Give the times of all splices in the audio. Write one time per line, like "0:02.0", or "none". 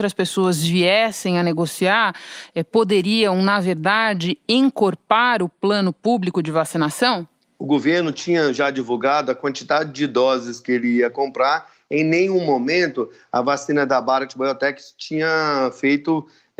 none